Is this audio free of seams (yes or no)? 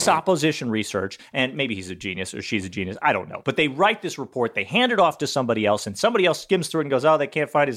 yes